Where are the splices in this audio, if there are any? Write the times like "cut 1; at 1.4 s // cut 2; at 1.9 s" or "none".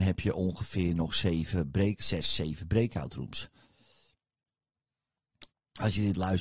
cut 1; at 5.5 s